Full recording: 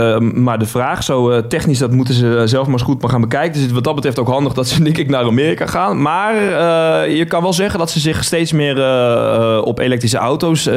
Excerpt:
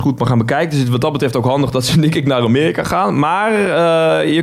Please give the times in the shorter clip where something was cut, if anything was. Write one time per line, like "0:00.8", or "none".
none